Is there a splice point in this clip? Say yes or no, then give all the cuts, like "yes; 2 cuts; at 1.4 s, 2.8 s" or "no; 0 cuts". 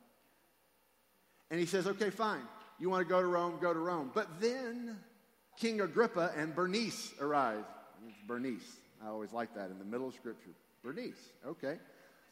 yes; 1 cut; at 5.5 s